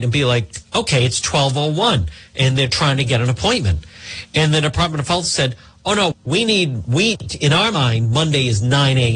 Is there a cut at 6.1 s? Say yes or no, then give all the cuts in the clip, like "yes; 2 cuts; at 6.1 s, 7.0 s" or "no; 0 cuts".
yes; 1 cut; at 6.1 s